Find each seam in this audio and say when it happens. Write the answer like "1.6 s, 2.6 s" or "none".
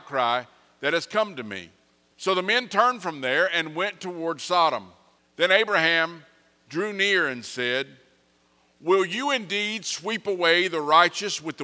2.1 s, 5.2 s